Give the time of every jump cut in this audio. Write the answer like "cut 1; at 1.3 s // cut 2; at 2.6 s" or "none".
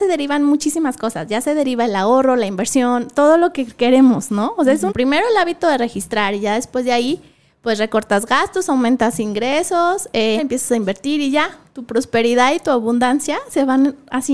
cut 1; at 4.9 s // cut 2; at 10.4 s